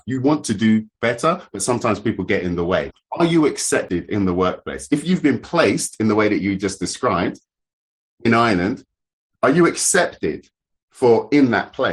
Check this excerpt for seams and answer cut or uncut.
cut